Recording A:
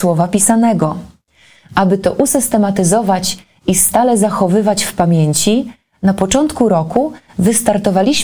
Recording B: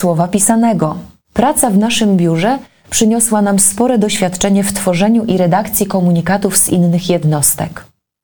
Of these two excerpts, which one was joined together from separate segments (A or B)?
B